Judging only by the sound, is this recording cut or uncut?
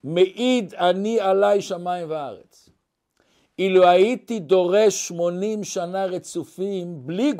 uncut